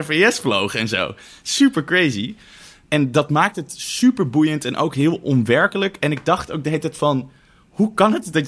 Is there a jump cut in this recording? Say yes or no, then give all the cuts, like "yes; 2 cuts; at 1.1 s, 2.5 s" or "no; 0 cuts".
no; 0 cuts